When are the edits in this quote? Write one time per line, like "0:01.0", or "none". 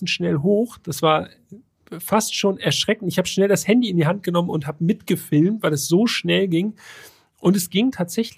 none